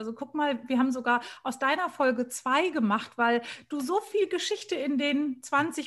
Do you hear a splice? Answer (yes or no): no